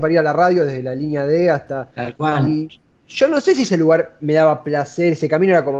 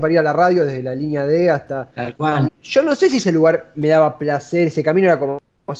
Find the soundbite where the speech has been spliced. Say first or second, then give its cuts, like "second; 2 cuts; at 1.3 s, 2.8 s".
second; 1 cut; at 2.5 s